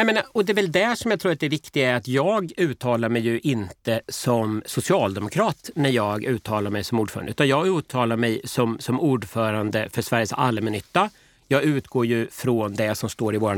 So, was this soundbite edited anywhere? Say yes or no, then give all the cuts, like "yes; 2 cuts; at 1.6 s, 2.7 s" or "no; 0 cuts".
no; 0 cuts